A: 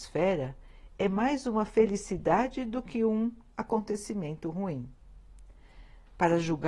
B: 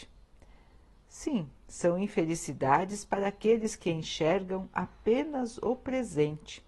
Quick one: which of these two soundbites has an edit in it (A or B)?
A